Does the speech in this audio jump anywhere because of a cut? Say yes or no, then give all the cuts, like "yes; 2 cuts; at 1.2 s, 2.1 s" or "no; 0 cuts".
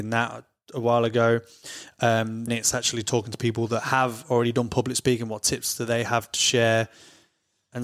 yes; 1 cut; at 2.5 s